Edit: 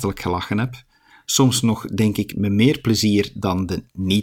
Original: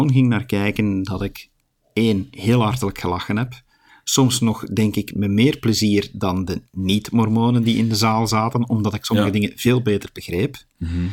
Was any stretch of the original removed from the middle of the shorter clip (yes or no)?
no